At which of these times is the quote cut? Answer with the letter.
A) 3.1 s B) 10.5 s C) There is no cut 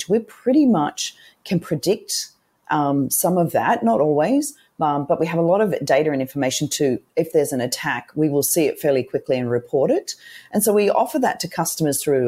C